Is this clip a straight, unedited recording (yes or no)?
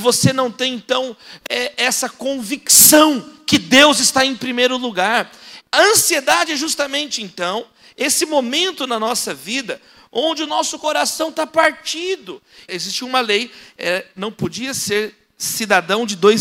no